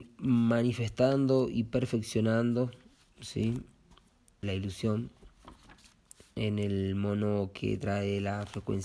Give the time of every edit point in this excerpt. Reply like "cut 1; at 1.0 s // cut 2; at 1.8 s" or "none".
cut 1; at 4.4 s